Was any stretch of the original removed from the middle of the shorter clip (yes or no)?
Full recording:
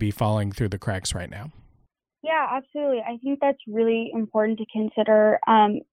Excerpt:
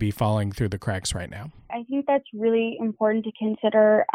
yes